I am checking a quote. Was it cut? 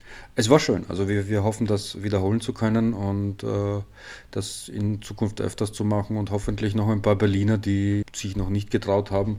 yes; 1 cut; at 8.0 s

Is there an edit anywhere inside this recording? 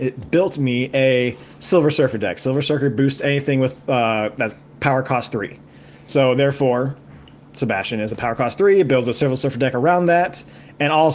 no; 0 cuts

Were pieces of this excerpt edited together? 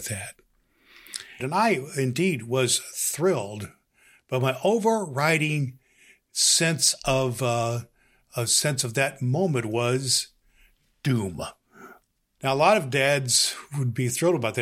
yes; 2 cuts; at 1.4 s, 12.4 s

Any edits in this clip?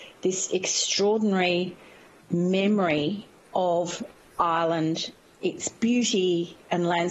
no; 0 cuts

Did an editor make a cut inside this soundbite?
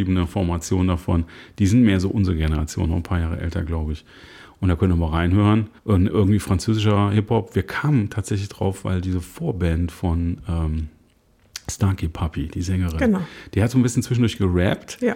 yes; 1 cut; at 5.8 s

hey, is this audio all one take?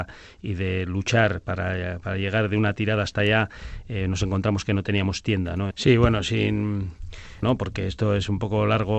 no; 2 cuts; at 5.7 s, 7.4 s

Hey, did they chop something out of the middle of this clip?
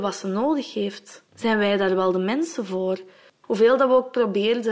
yes; 2 cuts; at 1.3 s, 3.4 s

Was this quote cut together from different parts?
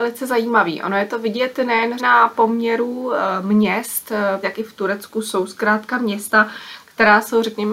yes; 2 cuts; at 2.0 s, 4.4 s

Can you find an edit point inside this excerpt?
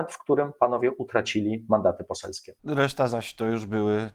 yes; 1 cut; at 2.6 s

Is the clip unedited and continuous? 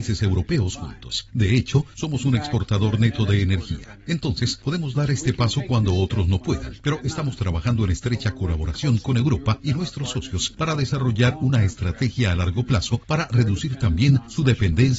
yes; 0 cuts

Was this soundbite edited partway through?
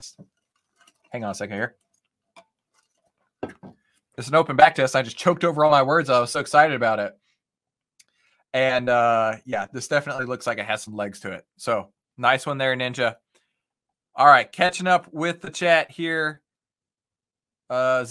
no; 0 cuts

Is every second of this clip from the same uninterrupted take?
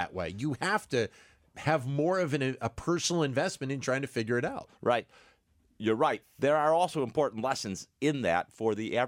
no; 2 cuts; at 5.1 s, 6.2 s

